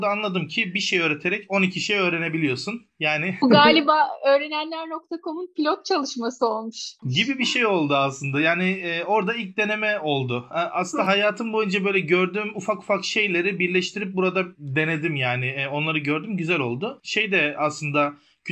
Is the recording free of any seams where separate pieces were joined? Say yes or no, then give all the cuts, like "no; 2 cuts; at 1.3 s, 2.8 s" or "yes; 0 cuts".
yes; 0 cuts